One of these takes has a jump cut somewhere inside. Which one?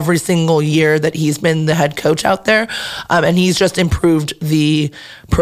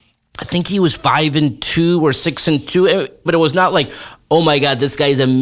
second; 1 cut; at 3.3 s

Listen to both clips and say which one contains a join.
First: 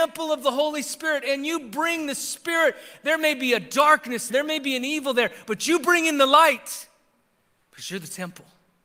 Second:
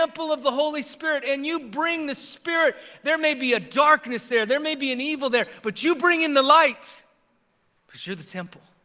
first; 1 cut; at 4.3 s

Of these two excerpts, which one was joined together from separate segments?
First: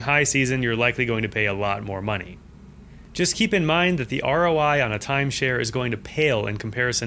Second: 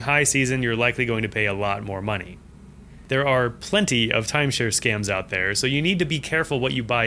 second; 1 cut; at 3.1 s

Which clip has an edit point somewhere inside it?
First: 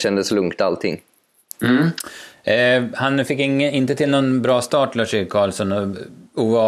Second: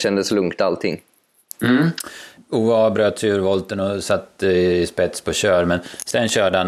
second; 1 cut; at 2.4 s

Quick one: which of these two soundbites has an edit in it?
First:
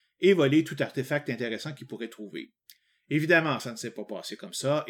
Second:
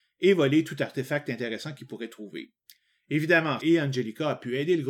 second; 1 cut; at 3.6 s

